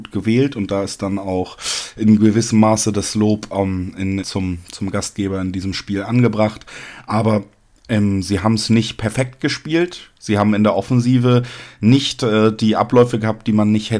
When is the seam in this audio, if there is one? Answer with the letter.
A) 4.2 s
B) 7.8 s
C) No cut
A